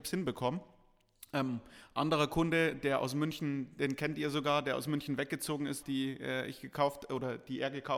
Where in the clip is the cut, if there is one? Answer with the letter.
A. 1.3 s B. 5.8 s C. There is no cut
B